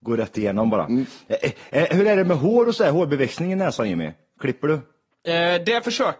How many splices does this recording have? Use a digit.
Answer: 0